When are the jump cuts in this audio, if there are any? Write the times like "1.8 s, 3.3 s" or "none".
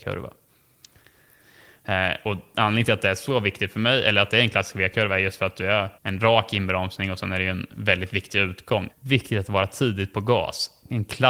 6.0 s, 8.9 s